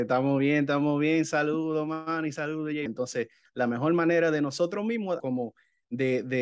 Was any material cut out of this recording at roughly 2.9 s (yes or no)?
yes